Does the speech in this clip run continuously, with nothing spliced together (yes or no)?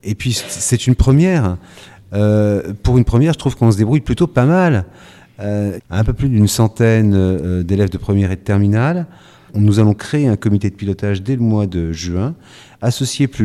no